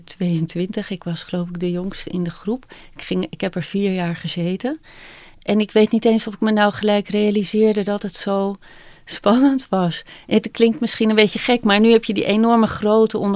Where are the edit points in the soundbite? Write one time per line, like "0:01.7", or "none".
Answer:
none

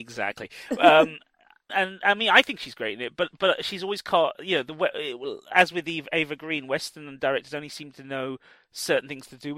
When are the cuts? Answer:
0:01.7

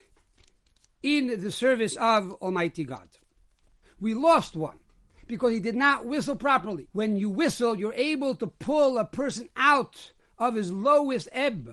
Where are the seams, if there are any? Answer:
0:03.8
0:06.9

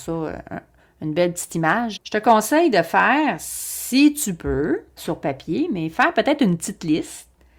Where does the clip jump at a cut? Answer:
0:02.0
0:05.0

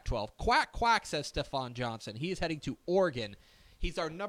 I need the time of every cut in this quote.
none

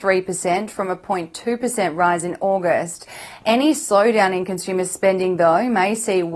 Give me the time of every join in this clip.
none

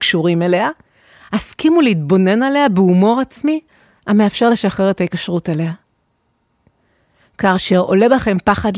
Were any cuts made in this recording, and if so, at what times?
none

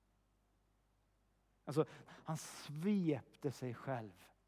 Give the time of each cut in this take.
0:02.1

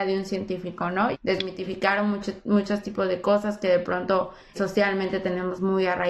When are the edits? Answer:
0:01.1
0:04.5

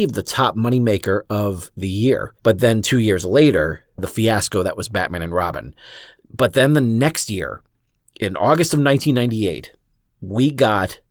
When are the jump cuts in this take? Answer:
0:02.4
0:06.2

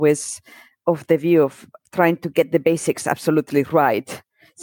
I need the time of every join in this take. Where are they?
none

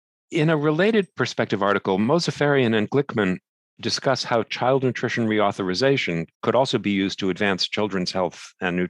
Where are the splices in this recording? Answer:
0:06.3

